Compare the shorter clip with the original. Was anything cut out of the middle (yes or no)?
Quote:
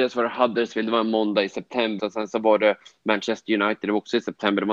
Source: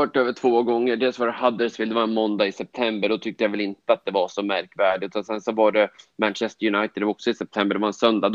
yes